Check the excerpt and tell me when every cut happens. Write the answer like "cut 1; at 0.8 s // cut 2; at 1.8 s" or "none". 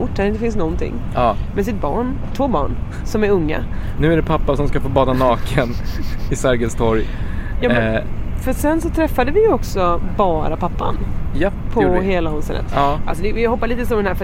cut 1; at 4.0 s